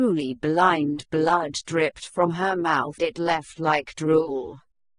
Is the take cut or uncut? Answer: cut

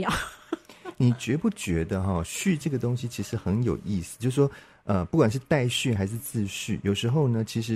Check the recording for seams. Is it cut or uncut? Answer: uncut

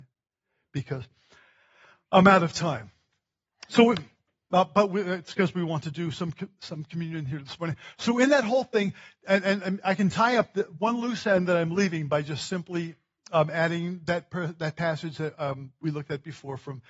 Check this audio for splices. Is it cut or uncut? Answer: uncut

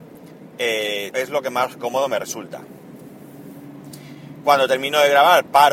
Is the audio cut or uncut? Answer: cut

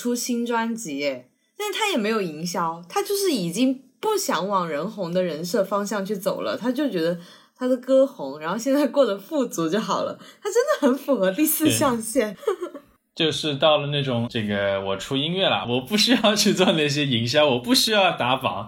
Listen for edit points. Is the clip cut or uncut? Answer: cut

